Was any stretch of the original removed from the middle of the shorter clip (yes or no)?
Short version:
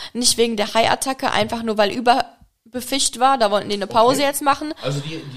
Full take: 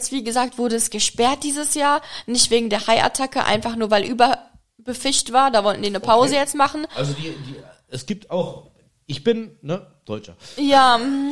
no